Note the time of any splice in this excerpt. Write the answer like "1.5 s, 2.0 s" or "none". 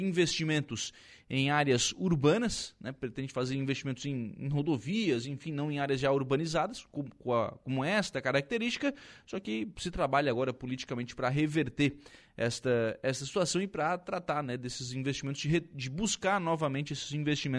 none